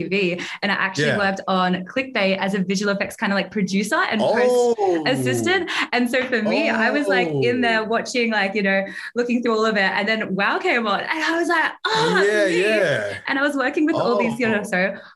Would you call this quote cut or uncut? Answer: uncut